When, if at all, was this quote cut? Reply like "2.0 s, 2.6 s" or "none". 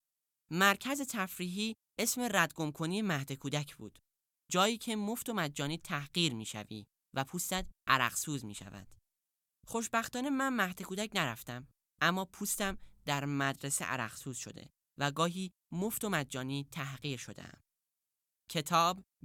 none